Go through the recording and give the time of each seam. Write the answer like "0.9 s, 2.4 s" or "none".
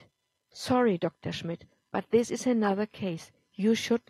none